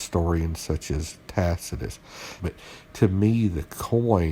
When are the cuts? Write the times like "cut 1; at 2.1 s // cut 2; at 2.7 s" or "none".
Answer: cut 1; at 2.4 s